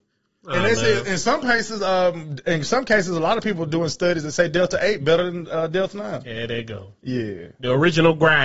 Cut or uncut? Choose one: uncut